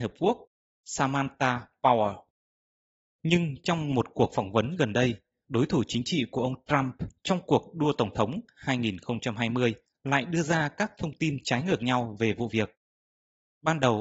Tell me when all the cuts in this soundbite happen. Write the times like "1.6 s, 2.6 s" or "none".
5.4 s, 7.2 s